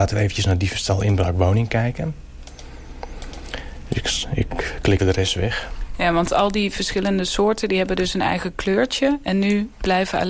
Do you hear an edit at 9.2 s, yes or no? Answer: no